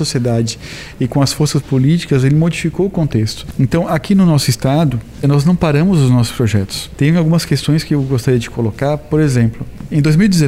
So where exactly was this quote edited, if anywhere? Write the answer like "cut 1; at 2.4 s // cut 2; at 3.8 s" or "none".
cut 1; at 5.2 s